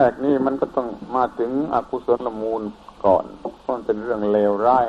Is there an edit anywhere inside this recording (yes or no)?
yes